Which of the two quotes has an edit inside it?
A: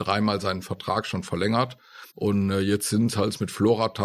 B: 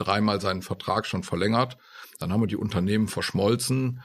A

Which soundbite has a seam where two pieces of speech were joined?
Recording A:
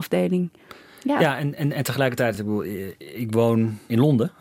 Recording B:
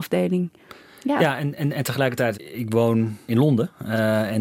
B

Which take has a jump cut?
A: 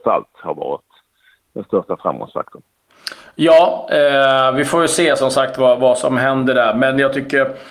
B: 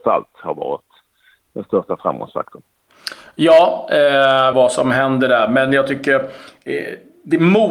B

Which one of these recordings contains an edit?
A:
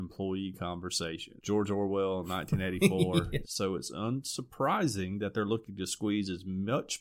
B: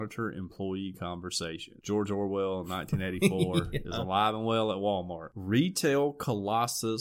A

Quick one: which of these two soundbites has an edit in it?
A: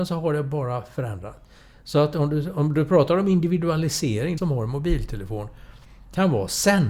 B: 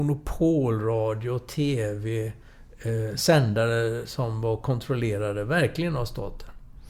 A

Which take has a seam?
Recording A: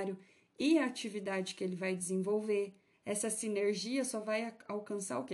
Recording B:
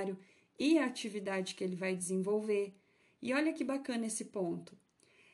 A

